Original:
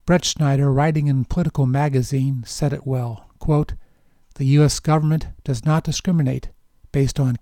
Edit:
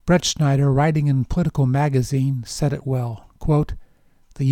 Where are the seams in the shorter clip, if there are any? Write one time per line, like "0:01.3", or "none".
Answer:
none